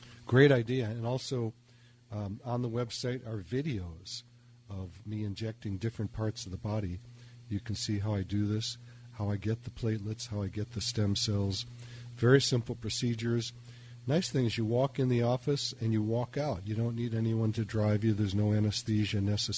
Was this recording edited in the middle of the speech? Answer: no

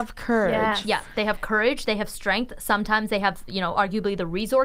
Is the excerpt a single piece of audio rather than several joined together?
yes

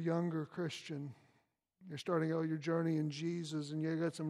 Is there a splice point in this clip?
no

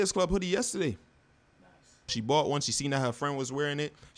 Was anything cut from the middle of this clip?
yes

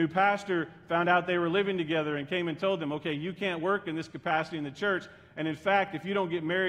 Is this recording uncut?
yes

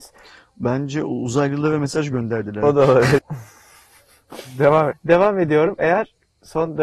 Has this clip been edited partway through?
yes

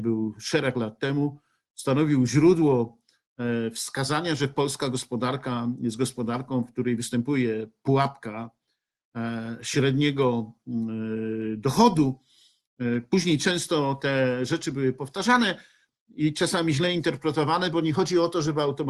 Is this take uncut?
yes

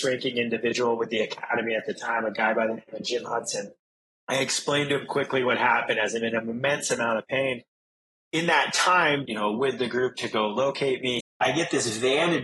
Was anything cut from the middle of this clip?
yes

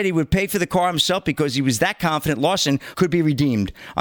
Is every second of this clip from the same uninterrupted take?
no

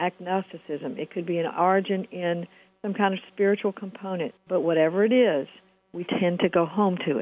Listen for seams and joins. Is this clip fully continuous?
no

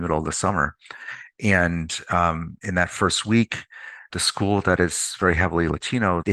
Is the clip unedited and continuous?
no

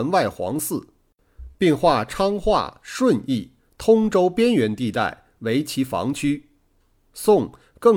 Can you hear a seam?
no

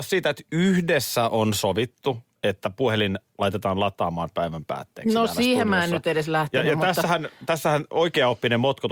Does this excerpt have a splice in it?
no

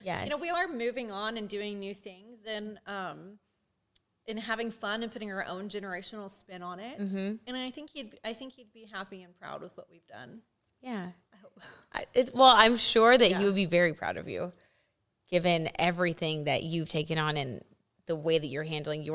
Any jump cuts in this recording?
no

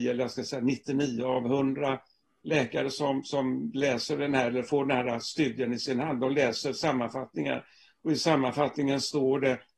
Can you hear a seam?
no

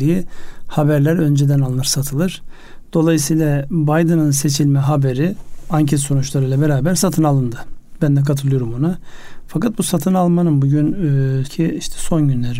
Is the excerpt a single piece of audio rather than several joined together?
no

